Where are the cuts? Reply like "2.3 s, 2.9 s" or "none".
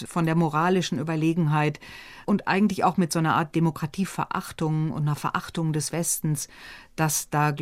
none